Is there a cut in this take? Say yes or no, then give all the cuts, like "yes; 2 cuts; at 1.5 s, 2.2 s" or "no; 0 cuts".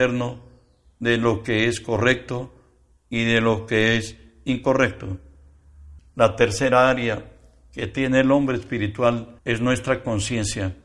yes; 2 cuts; at 6.0 s, 9.4 s